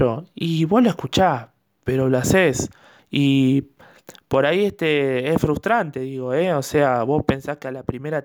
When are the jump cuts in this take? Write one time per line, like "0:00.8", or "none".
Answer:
0:03.0